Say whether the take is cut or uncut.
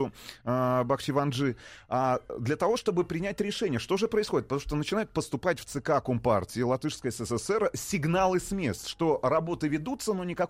uncut